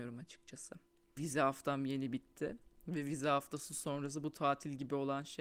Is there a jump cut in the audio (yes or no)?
yes